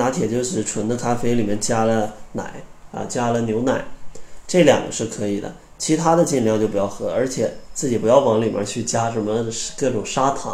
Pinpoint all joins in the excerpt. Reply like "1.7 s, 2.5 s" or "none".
none